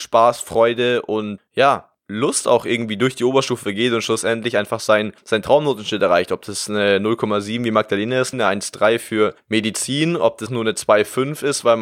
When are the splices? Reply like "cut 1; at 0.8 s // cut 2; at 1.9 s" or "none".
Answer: cut 1; at 8.3 s // cut 2; at 10.5 s